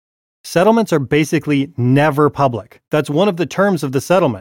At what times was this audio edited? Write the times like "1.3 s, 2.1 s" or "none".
2.9 s